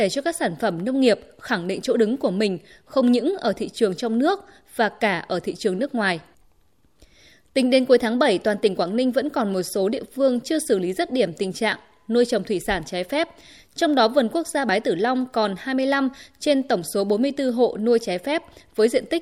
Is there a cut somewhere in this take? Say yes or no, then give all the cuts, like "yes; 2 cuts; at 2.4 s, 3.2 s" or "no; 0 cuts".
no; 0 cuts